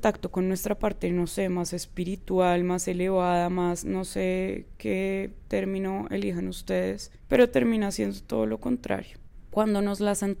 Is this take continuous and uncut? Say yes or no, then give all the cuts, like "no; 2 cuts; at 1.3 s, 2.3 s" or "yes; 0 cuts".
no; 1 cut; at 9.5 s